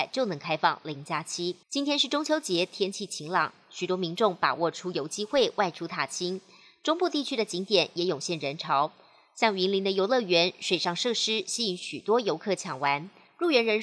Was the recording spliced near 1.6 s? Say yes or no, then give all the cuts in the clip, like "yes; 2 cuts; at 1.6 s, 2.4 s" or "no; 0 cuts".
yes; 1 cut; at 1.6 s